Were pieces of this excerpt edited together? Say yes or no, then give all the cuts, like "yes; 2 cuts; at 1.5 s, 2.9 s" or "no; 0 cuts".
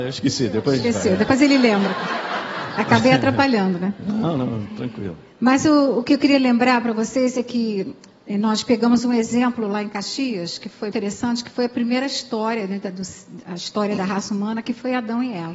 yes; 1 cut; at 10.9 s